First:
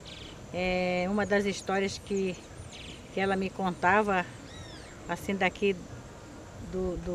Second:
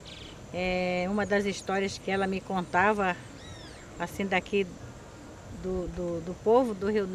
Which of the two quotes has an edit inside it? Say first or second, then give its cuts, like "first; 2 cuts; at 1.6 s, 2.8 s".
second; 1 cut; at 2.0 s